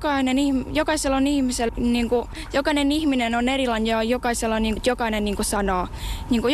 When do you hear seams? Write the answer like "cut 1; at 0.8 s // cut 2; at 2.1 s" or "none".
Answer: cut 1; at 1.7 s // cut 2; at 4.8 s